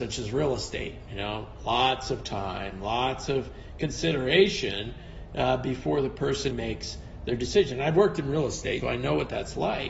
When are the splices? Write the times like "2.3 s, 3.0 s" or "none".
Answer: 6.5 s, 8.8 s